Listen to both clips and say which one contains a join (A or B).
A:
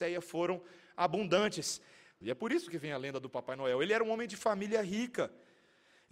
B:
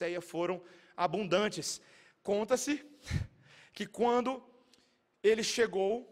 A